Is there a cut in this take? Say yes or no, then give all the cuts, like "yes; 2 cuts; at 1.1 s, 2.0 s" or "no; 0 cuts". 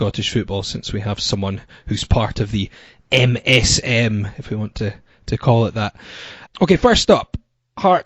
yes; 1 cut; at 6.5 s